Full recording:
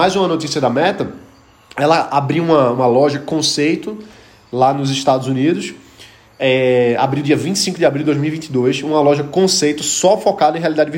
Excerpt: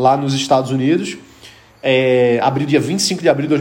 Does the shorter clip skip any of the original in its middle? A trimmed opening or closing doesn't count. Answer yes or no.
no